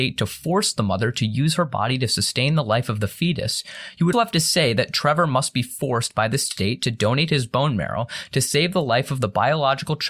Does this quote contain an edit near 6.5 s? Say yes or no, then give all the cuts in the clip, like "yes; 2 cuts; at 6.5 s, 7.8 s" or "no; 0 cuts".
no; 1 cut; at 4.1 s